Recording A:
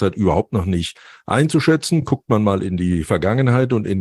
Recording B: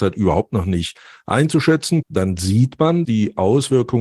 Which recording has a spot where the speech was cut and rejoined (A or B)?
B